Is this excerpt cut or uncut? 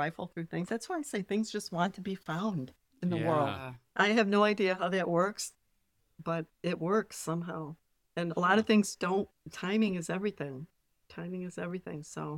uncut